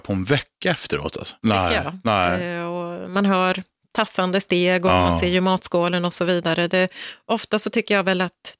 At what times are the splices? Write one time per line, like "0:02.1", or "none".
0:01.4

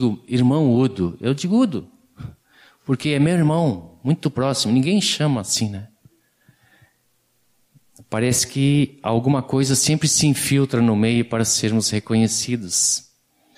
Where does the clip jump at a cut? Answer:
none

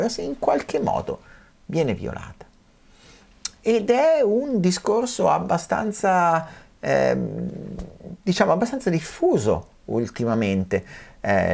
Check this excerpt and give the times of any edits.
none

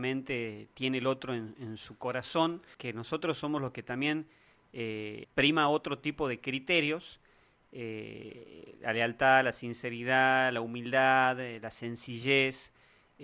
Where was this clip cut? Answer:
0:02.7
0:05.2

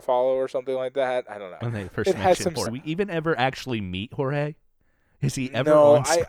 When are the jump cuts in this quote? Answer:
0:01.6
0:02.7

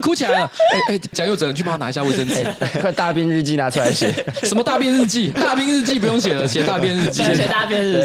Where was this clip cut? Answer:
none

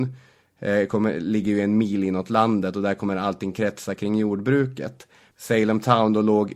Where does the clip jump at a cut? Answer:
0:05.3

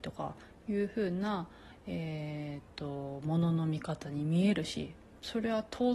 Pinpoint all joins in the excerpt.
none

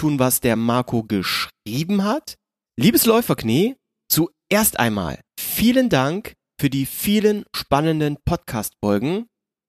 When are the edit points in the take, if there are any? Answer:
0:02.7
0:05.3

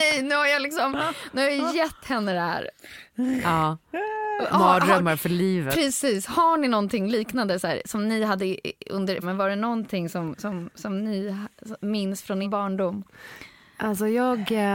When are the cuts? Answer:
0:09.2
0:12.4

